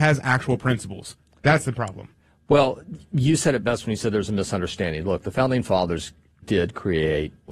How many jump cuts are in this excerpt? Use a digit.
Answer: 1